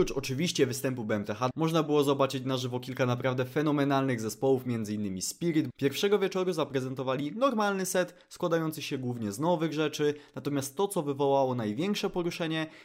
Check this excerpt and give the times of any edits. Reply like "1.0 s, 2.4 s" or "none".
1.5 s, 5.7 s